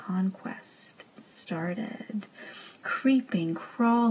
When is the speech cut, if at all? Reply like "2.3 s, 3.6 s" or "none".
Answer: none